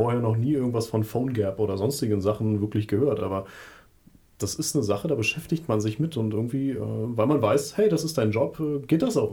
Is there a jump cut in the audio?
no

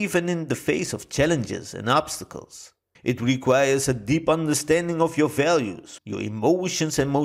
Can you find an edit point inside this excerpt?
yes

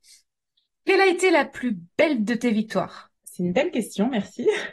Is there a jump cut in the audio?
yes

